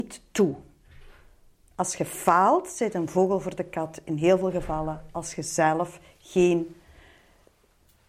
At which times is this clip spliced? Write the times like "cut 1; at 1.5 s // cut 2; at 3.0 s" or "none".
none